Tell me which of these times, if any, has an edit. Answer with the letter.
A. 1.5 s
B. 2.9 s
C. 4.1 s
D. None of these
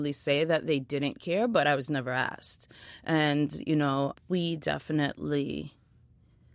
C